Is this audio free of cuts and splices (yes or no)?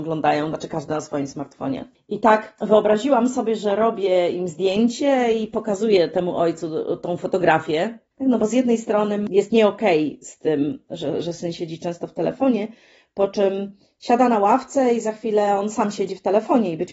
no